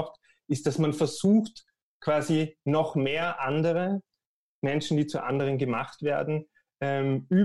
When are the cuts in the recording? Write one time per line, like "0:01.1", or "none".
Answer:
none